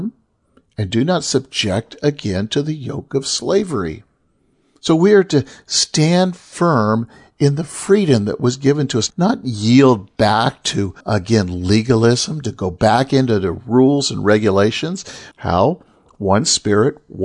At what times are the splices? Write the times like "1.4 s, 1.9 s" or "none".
9.1 s, 11.0 s, 15.3 s